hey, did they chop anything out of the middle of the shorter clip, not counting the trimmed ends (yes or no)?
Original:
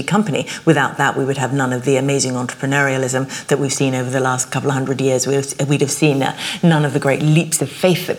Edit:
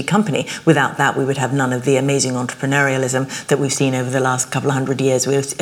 no